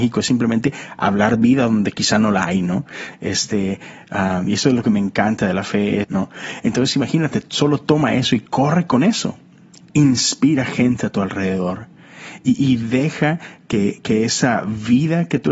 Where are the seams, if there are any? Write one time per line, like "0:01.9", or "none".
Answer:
0:06.0